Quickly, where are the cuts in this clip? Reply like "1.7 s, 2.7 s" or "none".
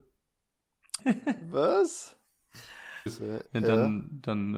1.0 s, 3.1 s